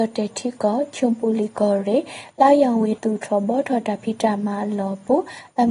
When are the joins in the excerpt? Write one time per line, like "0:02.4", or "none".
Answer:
0:03.0